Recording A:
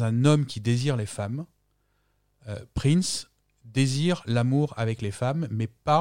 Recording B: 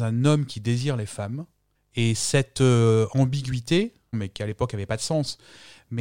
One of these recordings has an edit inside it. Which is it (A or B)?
B